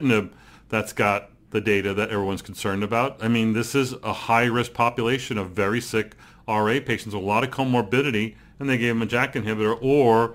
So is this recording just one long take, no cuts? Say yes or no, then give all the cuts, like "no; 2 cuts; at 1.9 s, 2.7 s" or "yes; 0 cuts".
no; 1 cut; at 3.2 s